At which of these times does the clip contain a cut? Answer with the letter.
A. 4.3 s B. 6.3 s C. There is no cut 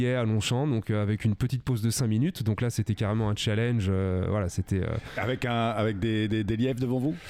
C